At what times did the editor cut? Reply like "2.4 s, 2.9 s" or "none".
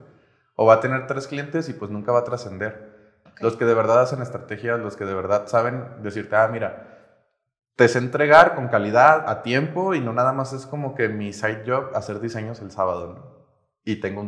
3.3 s